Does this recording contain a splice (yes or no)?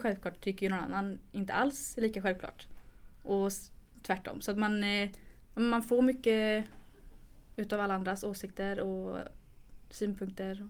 no